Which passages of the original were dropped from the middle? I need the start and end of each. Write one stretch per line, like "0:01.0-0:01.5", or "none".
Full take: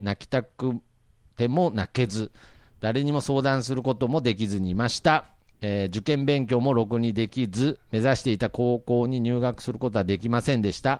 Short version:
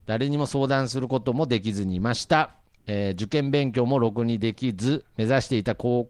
none